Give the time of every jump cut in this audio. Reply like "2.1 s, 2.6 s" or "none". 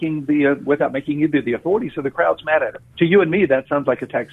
2.9 s